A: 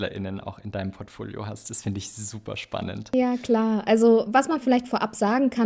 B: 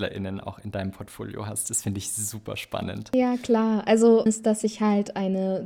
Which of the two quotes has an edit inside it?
B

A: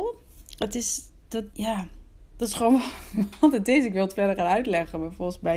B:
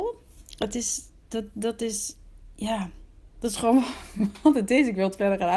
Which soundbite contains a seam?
A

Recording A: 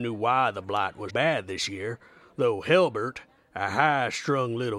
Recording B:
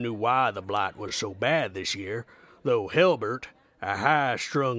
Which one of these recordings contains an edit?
A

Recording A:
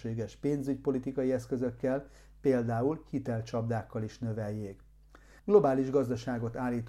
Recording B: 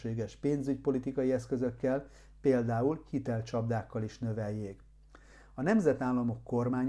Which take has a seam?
A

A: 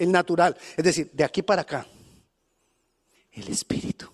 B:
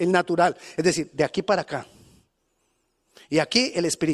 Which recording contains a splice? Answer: A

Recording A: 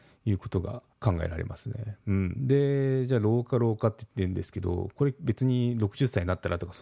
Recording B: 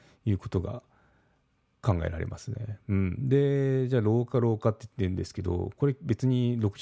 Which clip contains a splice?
A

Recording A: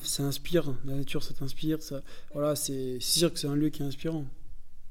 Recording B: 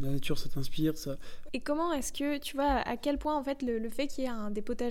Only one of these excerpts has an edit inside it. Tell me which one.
B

